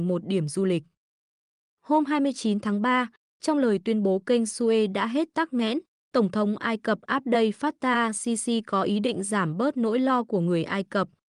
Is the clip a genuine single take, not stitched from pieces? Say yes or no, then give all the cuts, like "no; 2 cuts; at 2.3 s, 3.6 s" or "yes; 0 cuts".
yes; 0 cuts